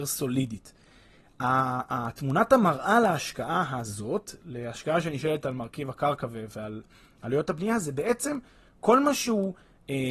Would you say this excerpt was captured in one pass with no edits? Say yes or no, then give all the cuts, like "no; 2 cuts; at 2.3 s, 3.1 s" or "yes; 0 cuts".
yes; 0 cuts